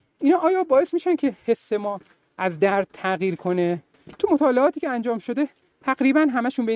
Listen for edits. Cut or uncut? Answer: uncut